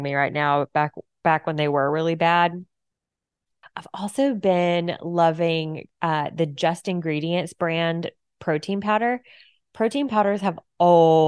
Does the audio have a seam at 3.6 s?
yes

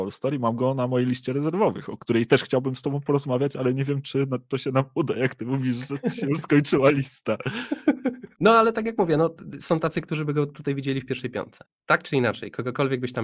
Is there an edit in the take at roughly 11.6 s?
yes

